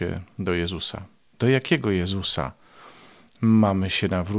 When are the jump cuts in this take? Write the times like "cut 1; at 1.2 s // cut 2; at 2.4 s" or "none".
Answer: none

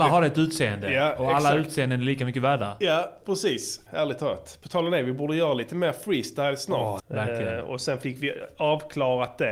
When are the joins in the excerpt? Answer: cut 1; at 3.9 s // cut 2; at 7.0 s

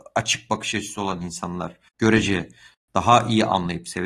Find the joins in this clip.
cut 1; at 1.9 s

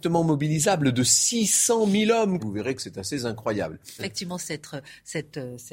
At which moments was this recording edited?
cut 1; at 2.4 s // cut 2; at 4.0 s

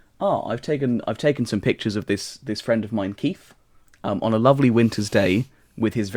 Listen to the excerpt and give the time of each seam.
none

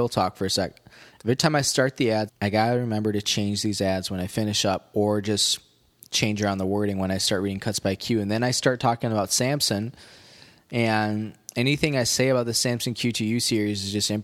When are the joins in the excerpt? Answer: cut 1; at 2.3 s

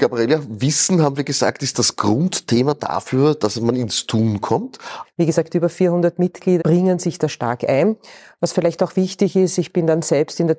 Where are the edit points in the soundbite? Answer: cut 1; at 5.0 s // cut 2; at 6.6 s

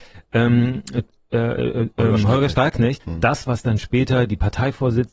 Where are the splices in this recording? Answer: cut 1; at 3.0 s

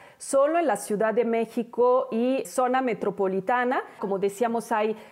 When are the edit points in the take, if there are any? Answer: cut 1; at 2.4 s // cut 2; at 4.0 s

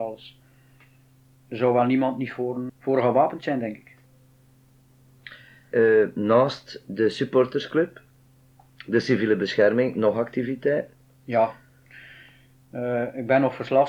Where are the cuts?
cut 1; at 2.7 s // cut 2; at 5.7 s

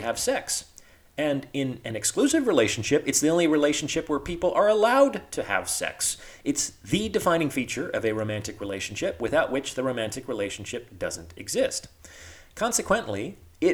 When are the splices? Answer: none

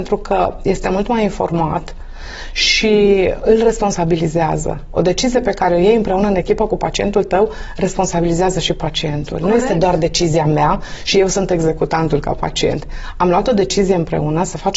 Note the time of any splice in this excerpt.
cut 1; at 3.4 s

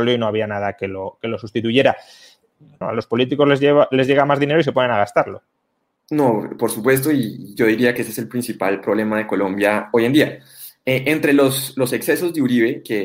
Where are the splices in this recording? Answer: cut 1; at 2.8 s

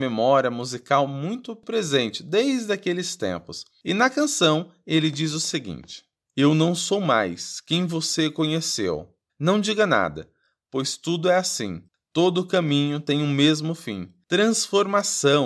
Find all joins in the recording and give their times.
cut 1; at 9.3 s

